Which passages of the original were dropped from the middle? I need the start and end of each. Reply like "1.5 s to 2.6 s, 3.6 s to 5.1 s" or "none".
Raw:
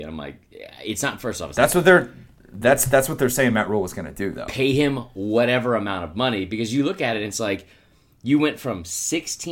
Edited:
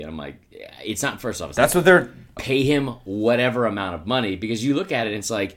2.4 s to 4.5 s